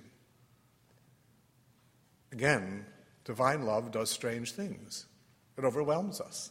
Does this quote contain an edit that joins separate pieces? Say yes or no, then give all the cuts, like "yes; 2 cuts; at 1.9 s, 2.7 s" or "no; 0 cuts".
no; 0 cuts